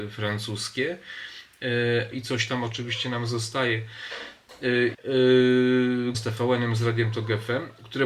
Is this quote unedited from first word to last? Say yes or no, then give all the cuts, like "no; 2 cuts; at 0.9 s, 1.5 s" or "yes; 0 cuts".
no; 3 cuts; at 2.1 s, 4.9 s, 6.1 s